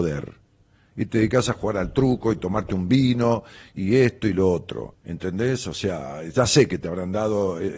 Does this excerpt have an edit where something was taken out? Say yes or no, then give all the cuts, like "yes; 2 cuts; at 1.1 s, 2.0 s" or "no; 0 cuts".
yes; 1 cut; at 4.9 s